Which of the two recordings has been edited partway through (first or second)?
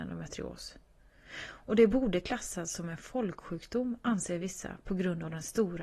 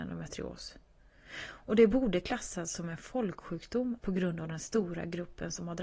second